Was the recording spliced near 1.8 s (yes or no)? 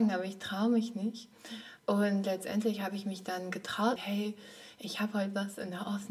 yes